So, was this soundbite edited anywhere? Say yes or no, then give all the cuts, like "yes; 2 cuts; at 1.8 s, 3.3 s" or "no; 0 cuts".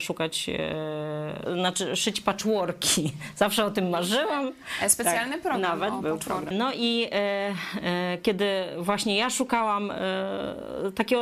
yes; 2 cuts; at 1.5 s, 6.5 s